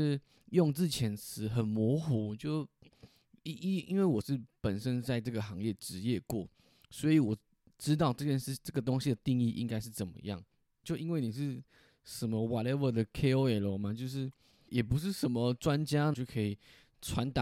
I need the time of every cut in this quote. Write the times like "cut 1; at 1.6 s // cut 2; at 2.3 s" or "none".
cut 1; at 10.8 s // cut 2; at 14.7 s // cut 3; at 16.1 s